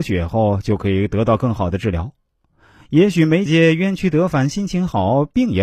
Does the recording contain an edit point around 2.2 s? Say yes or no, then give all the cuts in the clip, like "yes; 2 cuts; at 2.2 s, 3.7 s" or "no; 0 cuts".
no; 1 cut; at 3.5 s